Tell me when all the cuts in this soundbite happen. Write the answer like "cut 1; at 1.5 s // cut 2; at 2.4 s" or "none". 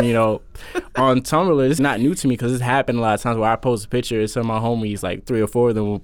cut 1; at 1.8 s